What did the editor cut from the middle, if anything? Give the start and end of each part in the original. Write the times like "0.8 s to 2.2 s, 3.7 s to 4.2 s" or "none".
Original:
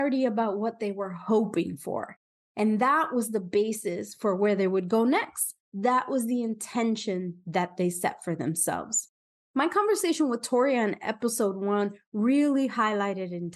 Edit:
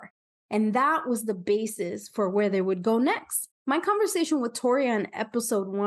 5.6 s to 9.4 s